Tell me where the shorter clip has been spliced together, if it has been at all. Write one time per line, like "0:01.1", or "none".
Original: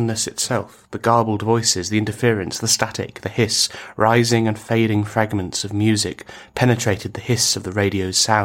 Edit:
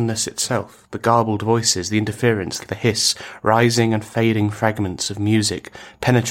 0:02.6